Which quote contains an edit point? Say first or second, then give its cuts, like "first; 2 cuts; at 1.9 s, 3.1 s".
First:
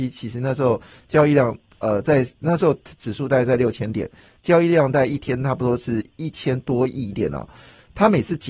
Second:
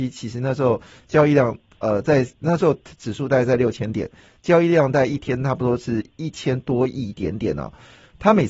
first; 1 cut; at 7.1 s